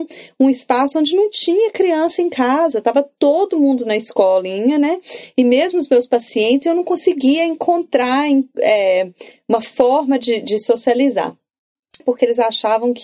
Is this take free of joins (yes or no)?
no